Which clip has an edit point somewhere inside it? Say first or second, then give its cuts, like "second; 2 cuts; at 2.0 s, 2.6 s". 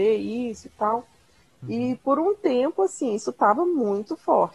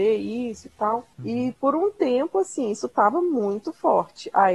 second; 1 cut; at 1.1 s